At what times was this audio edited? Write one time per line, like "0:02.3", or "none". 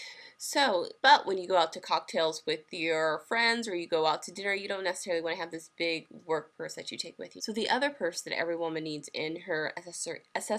0:01.0
0:07.4